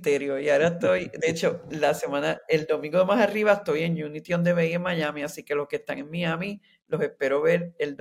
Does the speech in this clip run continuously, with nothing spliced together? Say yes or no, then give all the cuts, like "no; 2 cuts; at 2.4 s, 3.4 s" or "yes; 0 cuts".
yes; 0 cuts